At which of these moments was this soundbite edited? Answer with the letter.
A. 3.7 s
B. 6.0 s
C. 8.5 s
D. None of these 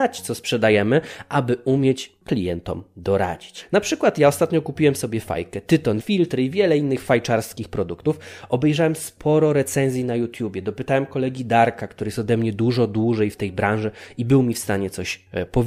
B